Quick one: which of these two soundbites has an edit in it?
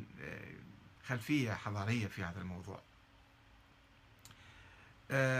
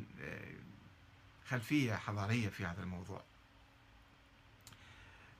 first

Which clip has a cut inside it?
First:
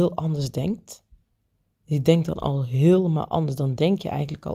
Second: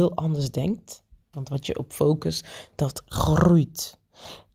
second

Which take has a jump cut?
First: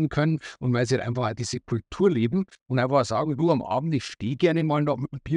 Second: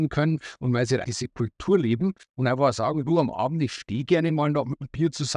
second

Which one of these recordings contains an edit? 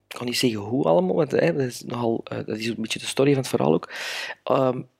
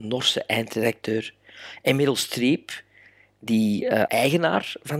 second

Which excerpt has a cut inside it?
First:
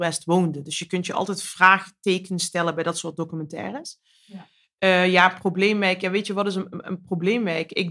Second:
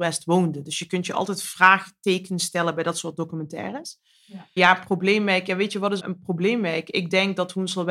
second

